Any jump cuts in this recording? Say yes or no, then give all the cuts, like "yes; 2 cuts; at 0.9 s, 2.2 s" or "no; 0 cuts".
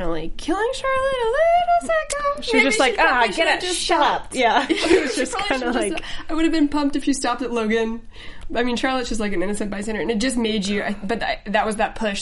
no; 0 cuts